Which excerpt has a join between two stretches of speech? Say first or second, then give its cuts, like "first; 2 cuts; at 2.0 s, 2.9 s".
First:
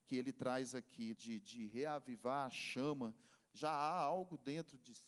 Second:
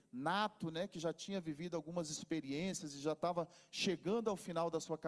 first; 2 cuts; at 1.1 s, 3.4 s